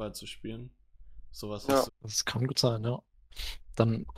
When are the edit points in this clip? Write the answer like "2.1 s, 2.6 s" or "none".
1.9 s